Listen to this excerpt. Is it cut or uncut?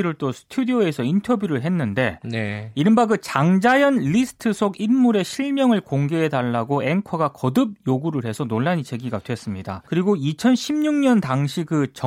cut